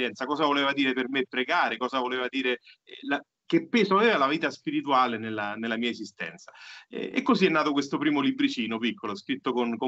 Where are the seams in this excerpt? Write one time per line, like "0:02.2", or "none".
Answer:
none